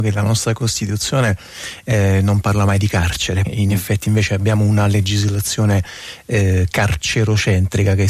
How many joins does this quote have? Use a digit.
1